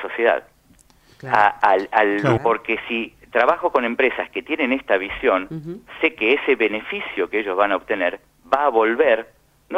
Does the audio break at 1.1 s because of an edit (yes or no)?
no